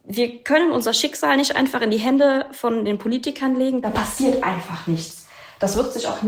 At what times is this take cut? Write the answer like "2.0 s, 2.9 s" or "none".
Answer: none